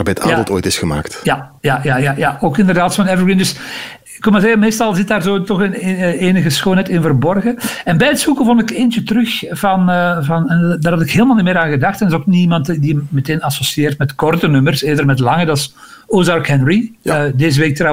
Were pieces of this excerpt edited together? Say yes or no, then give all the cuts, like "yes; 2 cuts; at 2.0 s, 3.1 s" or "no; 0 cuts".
no; 0 cuts